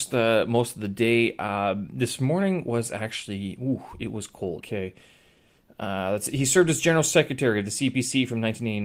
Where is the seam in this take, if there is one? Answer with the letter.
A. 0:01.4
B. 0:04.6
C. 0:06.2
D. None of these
B